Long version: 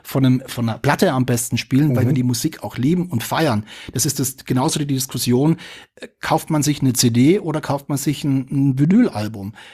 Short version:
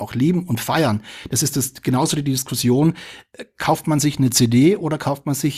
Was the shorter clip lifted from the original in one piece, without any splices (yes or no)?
yes